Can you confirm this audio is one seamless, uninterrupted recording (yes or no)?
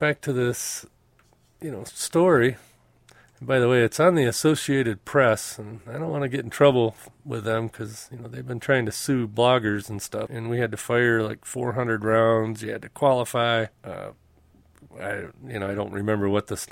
no